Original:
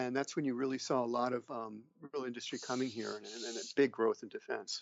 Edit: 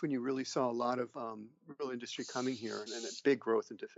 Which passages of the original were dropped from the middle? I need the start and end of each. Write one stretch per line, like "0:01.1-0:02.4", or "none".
0:03.2-0:03.4

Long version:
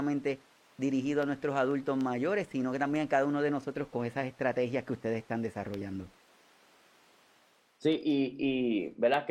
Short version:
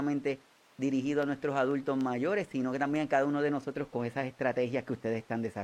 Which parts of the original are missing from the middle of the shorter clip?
none

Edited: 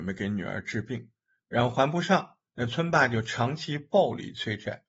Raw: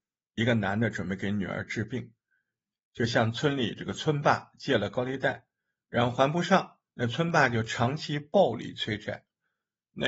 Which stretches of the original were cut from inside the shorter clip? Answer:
0:02.4-0:05.8

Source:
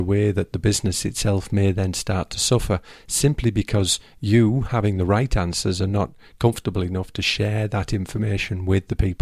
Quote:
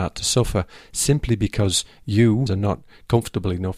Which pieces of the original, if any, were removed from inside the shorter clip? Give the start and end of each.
0:04.6-0:05.8

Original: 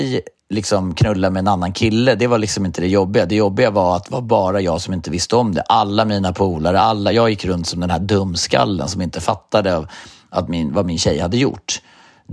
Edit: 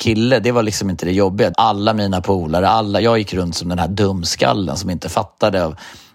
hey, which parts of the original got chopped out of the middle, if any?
0:03.3-0:05.6

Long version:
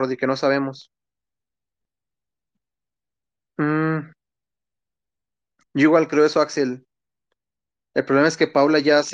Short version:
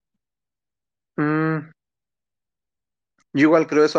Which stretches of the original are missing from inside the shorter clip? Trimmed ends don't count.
none

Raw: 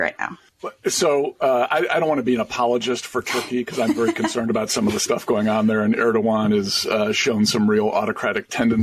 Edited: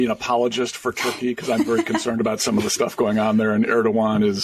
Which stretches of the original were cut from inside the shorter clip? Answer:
none

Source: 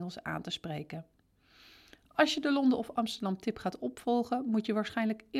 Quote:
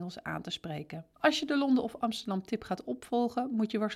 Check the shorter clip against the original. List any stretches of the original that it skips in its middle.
0:01.1-0:02.1

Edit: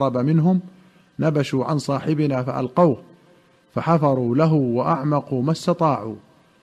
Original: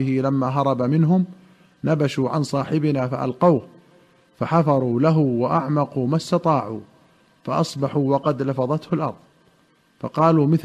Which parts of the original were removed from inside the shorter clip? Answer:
none

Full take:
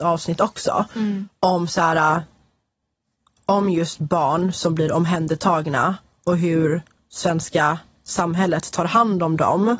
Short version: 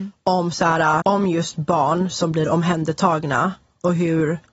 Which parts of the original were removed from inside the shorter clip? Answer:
0:02.2-0:03.4

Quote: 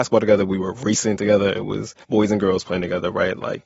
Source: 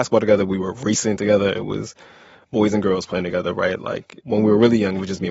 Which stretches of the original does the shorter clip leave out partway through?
0:02.0-0:02.5

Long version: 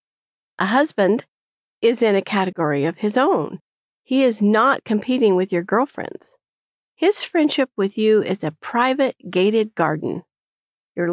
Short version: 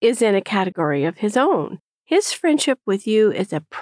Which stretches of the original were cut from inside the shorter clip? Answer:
0:03.8-0:06.9

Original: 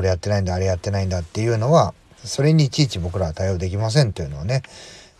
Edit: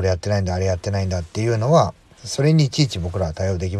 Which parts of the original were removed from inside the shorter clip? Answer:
none

